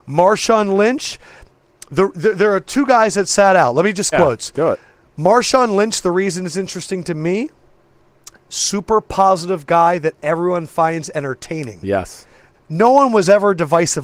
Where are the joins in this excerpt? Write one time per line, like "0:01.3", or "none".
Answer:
0:04.1
0:12.5